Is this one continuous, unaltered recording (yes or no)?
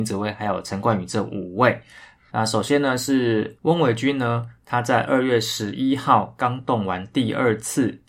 no